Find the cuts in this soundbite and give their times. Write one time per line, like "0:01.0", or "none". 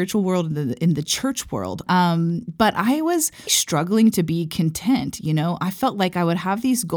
0:01.9
0:03.5